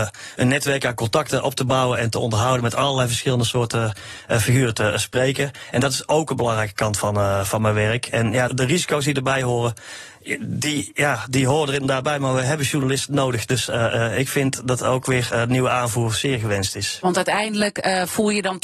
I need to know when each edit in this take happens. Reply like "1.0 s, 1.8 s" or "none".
8.5 s